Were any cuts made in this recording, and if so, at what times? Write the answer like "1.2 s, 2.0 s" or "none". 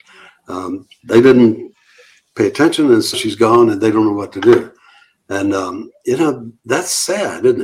3.1 s